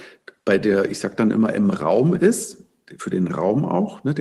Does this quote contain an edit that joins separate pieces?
no; 0 cuts

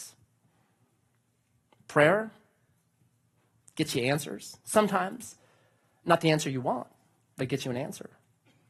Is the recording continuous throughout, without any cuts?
yes; 0 cuts

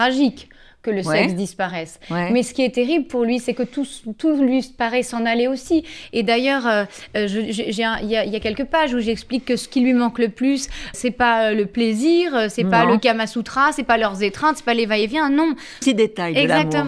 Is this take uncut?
no; 2 cuts; at 10.9 s, 15.8 s

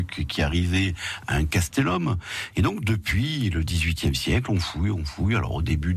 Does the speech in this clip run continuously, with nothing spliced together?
no; 1 cut; at 2.5 s

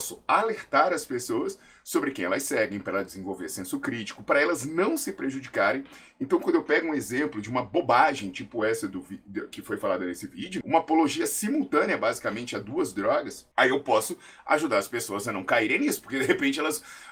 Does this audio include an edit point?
yes; 2 cuts; at 10.6 s, 13.5 s

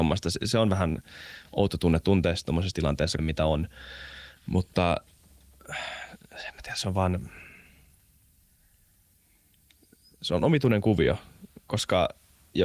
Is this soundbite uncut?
no; 1 cut; at 3.2 s

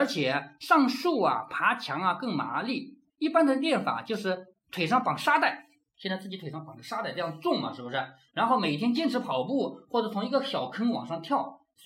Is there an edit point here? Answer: no; 0 cuts

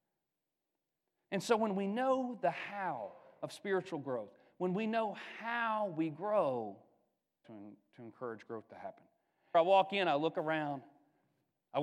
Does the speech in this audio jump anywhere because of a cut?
yes; 2 cuts; at 7.4 s, 9.5 s

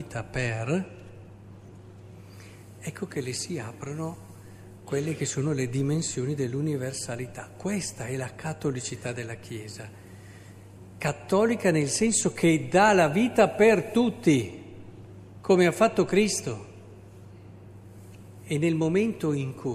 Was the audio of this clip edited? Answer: yes; 1 cut; at 18.4 s

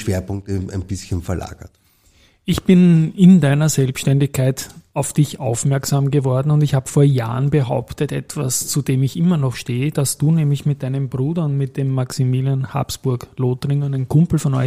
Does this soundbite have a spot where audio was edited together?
no; 0 cuts

